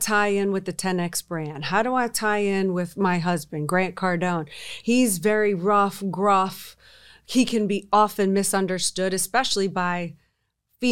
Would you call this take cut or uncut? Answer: uncut